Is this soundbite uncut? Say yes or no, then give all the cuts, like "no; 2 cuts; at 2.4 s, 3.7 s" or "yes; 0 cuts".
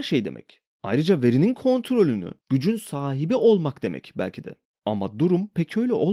no; 2 cuts; at 2.4 s, 4.7 s